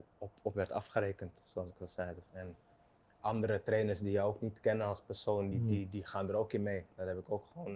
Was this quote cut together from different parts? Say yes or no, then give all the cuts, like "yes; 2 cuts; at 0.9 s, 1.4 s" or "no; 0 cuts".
yes; 2 cuts; at 2.3 s, 5.5 s